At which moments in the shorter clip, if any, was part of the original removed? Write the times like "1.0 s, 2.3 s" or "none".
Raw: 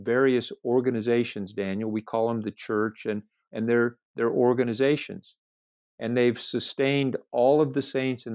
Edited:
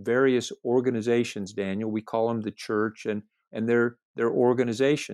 none